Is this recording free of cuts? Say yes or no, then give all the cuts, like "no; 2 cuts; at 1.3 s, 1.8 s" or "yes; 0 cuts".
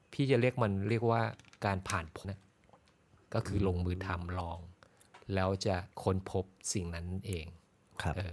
no; 2 cuts; at 2.2 s, 5.9 s